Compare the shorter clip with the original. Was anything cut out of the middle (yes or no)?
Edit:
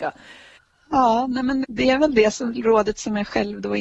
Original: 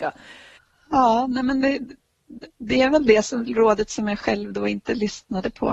yes